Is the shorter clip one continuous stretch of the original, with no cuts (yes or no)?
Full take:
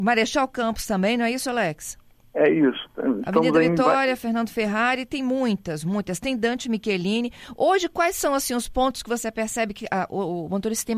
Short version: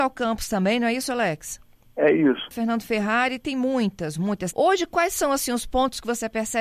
no